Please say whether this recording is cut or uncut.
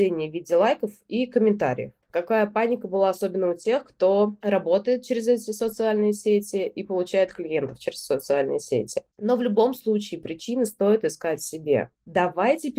cut